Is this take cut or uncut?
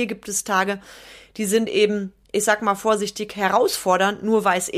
uncut